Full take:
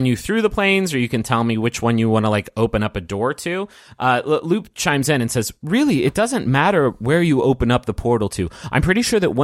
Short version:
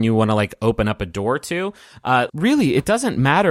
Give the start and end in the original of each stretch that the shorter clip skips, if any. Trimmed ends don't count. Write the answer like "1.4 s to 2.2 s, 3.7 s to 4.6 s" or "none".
4.2 s to 5.6 s